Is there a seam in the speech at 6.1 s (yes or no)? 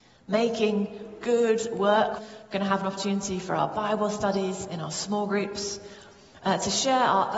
no